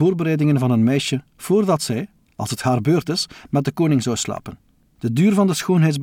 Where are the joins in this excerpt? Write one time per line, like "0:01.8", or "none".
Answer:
none